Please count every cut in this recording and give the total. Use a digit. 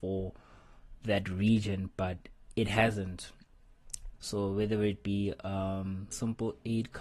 2